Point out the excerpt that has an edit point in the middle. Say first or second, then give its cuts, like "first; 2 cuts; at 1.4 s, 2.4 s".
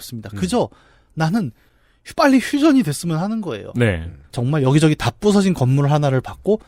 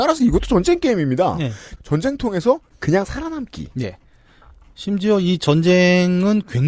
first; 1 cut; at 4.3 s